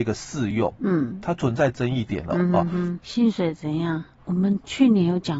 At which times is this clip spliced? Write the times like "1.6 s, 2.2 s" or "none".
3.0 s, 4.2 s